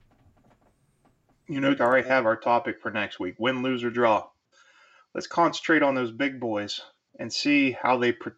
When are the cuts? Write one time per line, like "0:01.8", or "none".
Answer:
0:01.8

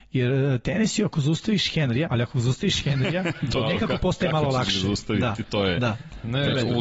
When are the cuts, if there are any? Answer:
0:02.1

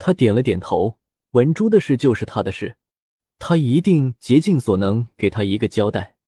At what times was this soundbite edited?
none

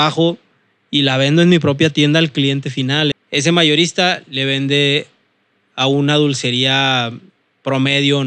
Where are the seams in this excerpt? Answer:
0:03.1

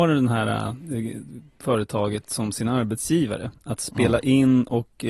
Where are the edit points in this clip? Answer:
0:03.6

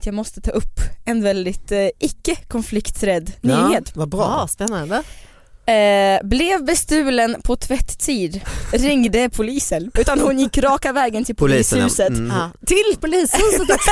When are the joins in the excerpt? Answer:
0:10.0

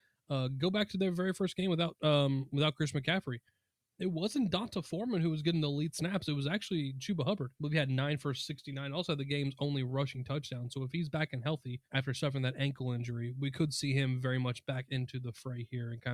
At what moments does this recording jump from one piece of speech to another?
0:07.5
0:11.8

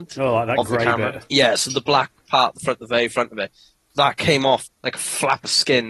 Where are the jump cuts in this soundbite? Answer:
none

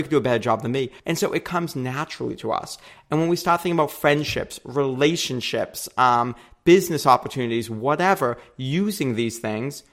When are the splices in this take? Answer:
0:01.0

